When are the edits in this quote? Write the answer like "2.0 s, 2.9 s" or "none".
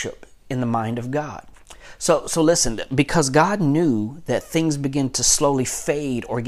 none